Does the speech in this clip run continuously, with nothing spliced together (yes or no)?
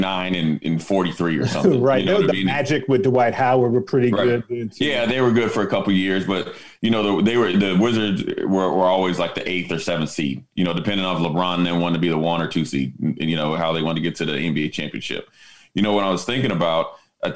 yes